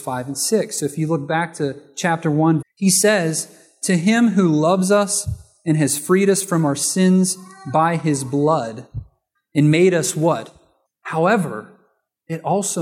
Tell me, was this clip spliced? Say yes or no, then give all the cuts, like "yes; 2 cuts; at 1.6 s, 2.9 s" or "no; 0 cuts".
yes; 2 cuts; at 2.6 s, 10.9 s